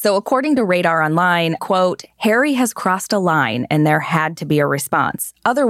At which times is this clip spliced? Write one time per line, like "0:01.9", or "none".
0:01.6